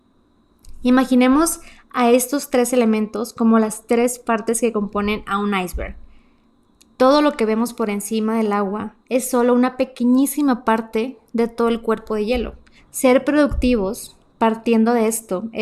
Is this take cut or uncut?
cut